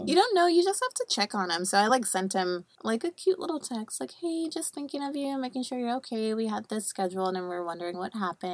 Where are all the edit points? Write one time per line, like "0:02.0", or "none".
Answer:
none